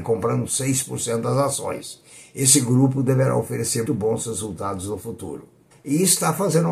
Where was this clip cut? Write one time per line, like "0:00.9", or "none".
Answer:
0:03.9
0:05.7